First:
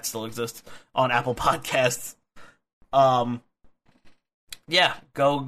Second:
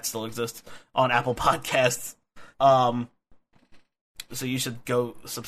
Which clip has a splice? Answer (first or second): second